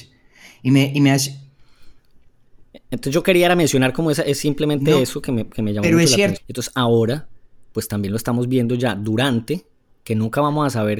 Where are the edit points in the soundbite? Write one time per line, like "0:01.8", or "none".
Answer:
0:06.4